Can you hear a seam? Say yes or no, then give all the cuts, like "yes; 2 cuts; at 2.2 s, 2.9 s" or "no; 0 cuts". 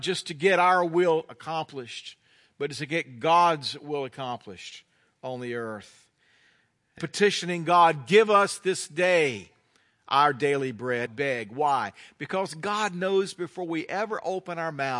yes; 2 cuts; at 7.0 s, 11.1 s